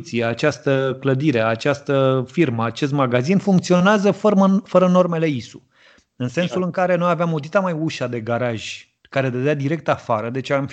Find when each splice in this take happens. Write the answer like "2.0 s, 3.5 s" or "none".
6.1 s, 9.0 s

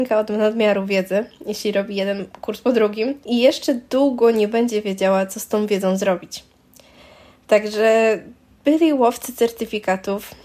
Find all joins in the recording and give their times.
3.2 s

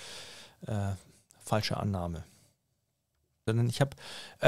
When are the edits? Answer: 3.5 s

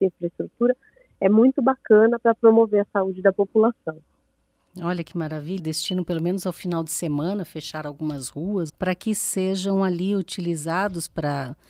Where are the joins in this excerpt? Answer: 5.6 s, 8.7 s

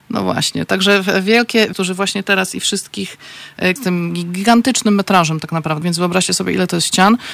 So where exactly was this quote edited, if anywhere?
1.7 s, 3.8 s, 5.8 s

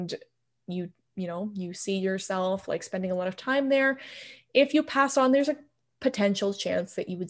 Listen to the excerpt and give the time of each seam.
none

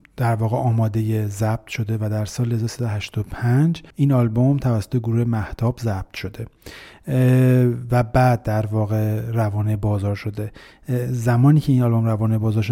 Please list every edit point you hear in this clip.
3.9 s

